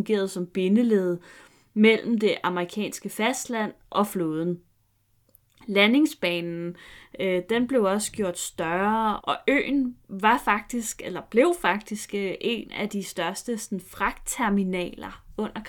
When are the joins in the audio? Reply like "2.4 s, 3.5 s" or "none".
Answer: 9.2 s